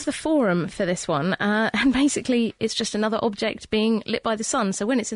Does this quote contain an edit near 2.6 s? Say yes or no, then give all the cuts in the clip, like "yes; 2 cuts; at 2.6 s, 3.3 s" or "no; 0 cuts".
yes; 1 cut; at 2.6 s